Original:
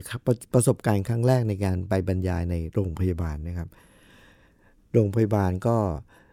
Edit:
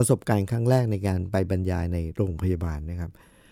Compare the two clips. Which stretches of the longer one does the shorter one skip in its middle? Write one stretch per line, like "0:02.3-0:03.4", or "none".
none

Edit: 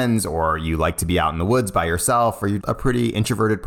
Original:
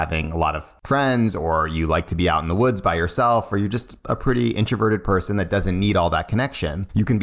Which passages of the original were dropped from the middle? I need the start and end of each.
0:03.7-0:04.0

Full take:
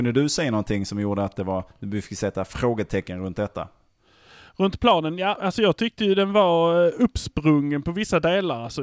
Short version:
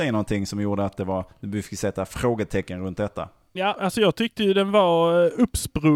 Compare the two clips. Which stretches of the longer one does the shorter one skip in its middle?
0:03.9-0:05.2

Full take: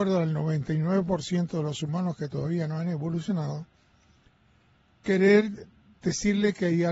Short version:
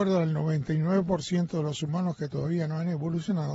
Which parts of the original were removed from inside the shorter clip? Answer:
none

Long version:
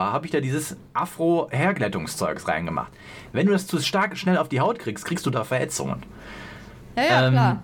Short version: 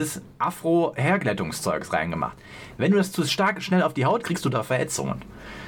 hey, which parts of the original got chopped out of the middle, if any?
0:04.8-0:05.0

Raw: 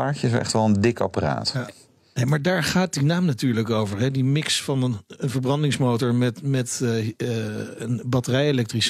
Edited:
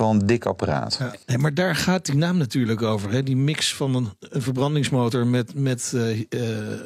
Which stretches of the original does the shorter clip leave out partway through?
0:01.8-0:02.1

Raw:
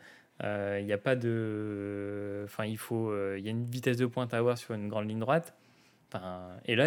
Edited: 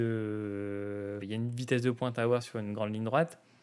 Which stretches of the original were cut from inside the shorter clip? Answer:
0:02.5-0:03.4

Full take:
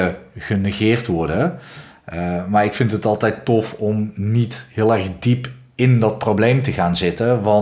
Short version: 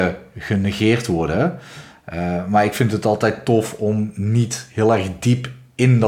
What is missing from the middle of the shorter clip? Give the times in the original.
none

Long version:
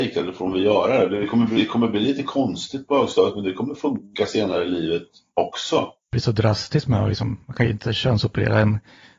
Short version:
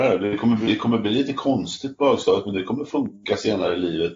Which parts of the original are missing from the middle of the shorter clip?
none

